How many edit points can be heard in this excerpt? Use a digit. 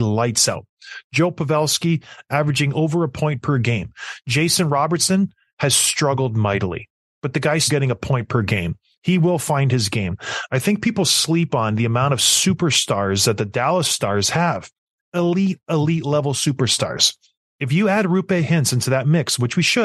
1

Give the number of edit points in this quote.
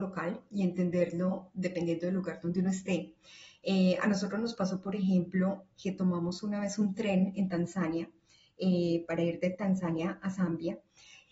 0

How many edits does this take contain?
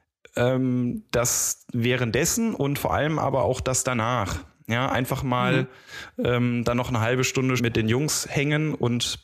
1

